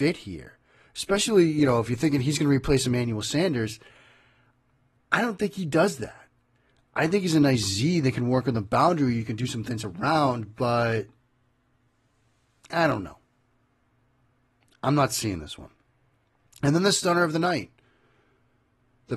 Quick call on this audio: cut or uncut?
uncut